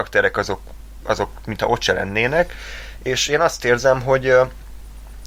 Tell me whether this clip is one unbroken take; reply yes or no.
yes